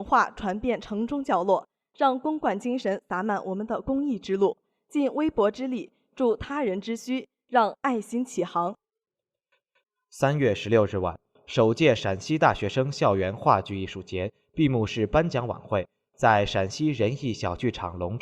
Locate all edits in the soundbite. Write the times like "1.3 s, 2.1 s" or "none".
none